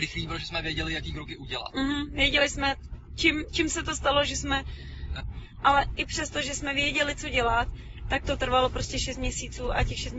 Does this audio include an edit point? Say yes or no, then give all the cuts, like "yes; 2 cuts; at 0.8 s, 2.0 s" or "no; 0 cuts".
yes; 1 cut; at 5.2 s